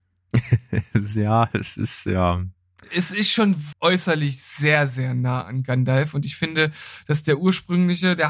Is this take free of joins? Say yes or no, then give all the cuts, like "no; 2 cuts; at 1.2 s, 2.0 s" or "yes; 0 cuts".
no; 1 cut; at 3.7 s